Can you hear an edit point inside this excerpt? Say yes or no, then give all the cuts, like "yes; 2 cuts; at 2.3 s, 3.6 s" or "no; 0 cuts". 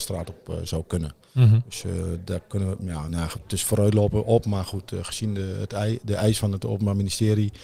no; 0 cuts